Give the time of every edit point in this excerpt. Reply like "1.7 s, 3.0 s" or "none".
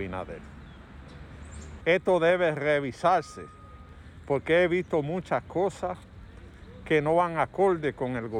1.8 s